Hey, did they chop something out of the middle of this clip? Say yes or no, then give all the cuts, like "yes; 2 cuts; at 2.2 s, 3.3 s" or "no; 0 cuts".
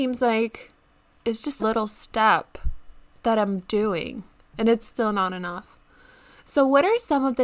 yes; 1 cut; at 1.6 s